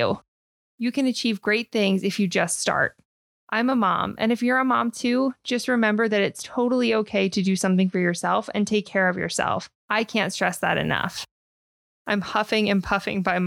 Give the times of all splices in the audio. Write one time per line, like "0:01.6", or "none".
0:09.8
0:11.9